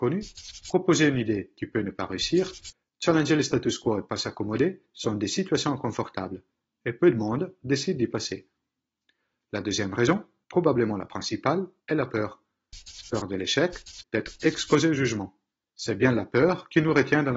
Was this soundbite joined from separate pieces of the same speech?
yes; 1 cut; at 14.0 s

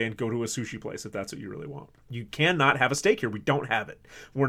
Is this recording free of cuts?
no; 1 cut; at 2.1 s

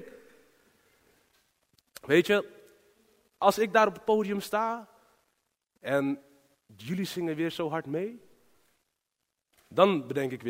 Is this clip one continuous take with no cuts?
yes; 0 cuts

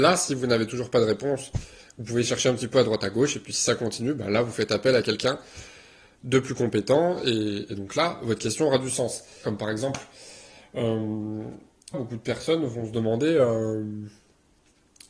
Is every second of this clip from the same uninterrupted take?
no; 2 cuts; at 9.4 s, 11.9 s

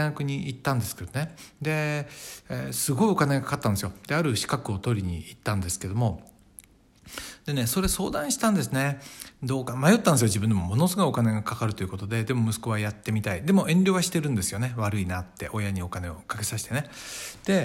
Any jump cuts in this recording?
no; 0 cuts

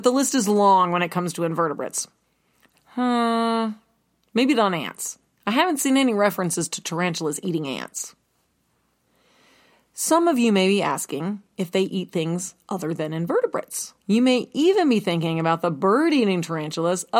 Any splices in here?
yes; 2 cuts; at 2.7 s, 14.0 s

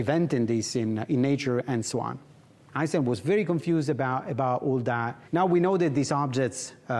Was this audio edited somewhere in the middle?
yes; 2 cuts; at 2.7 s, 5.3 s

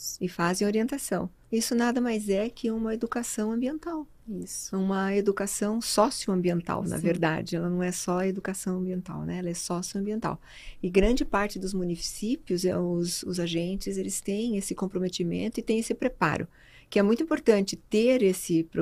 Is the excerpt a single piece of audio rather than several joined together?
no; 1 cut; at 1.4 s

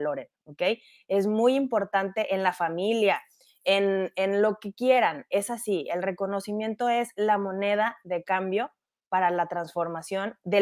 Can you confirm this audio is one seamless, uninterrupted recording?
yes; 0 cuts

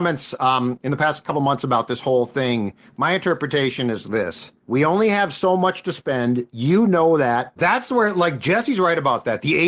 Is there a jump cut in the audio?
yes; 2 cuts; at 4.6 s, 7.6 s

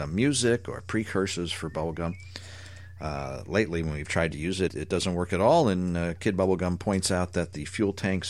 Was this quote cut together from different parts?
yes; 1 cut; at 4.7 s

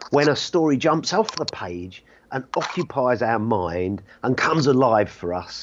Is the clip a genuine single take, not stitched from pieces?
yes; 0 cuts

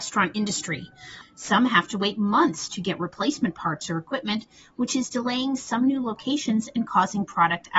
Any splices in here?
yes; 1 cut; at 1.2 s

